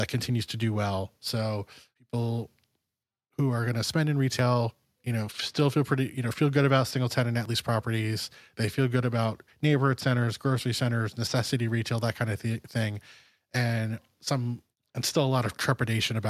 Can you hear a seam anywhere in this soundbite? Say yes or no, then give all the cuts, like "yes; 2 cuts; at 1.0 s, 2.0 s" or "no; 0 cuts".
no; 0 cuts